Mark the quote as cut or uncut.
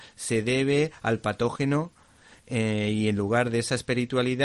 uncut